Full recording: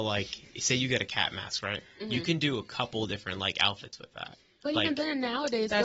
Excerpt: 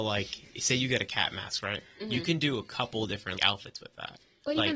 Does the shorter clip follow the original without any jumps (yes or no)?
no